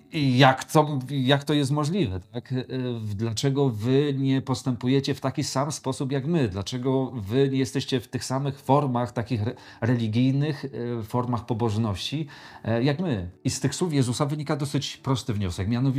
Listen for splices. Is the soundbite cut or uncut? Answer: uncut